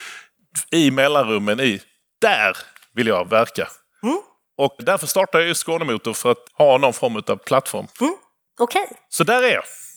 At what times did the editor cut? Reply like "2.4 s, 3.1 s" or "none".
4.8 s, 6.4 s, 7.9 s